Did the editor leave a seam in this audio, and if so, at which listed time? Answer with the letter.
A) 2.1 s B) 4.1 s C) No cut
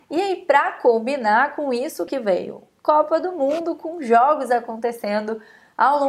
A